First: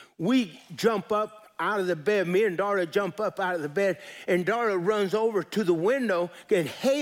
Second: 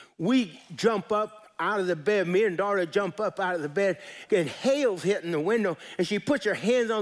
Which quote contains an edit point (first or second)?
second